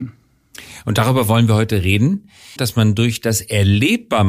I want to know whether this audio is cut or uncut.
cut